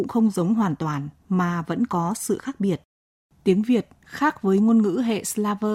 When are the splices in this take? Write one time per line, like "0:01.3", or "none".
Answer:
none